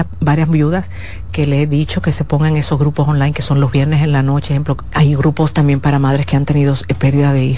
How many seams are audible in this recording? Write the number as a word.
one